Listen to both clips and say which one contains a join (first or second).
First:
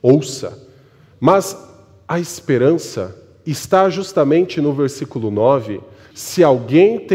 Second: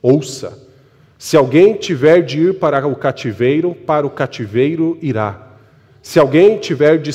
first